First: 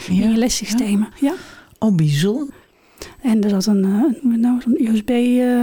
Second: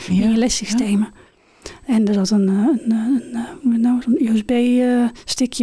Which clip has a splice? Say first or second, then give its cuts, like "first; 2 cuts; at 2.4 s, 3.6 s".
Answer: first; 3 cuts; at 1.1 s, 2.5 s, 4.2 s